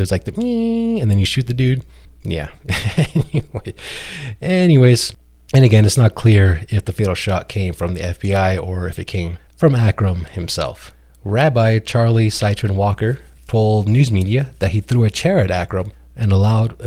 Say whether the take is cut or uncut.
uncut